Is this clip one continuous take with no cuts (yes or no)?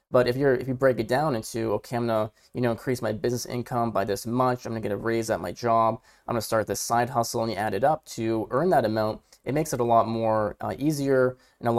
yes